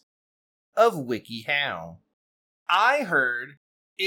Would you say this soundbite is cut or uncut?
cut